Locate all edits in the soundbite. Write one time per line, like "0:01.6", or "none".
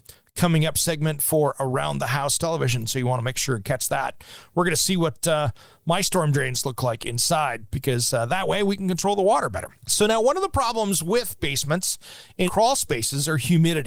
0:09.8
0:12.5